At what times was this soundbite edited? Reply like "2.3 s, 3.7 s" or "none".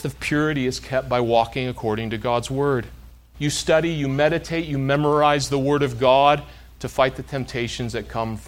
3.3 s